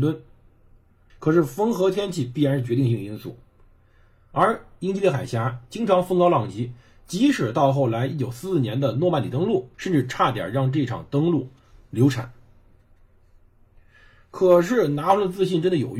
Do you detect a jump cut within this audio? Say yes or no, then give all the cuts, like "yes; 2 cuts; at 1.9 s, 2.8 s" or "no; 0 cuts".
yes; 2 cuts; at 1.1 s, 9.7 s